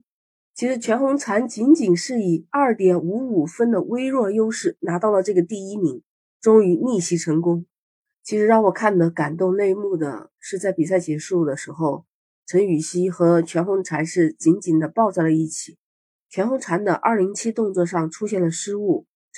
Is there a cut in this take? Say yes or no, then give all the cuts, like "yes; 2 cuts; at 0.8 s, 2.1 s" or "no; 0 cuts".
yes; 1 cut; at 16.2 s